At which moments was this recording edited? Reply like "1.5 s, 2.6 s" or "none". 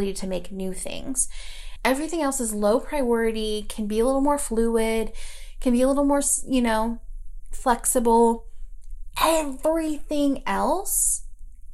1.8 s, 9.1 s